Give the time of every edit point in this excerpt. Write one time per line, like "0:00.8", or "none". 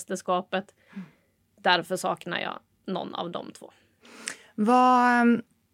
none